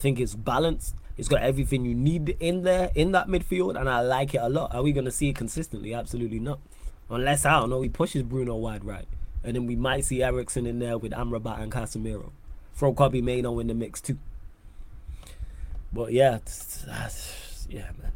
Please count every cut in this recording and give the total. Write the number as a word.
zero